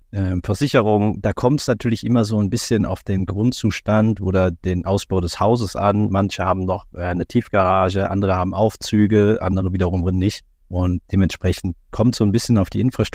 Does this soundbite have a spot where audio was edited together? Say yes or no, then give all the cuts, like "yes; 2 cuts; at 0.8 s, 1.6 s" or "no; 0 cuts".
no; 0 cuts